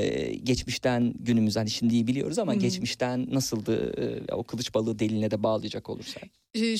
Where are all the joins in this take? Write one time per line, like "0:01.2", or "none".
none

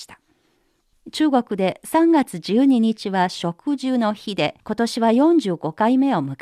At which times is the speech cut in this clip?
0:00.9
0:04.6

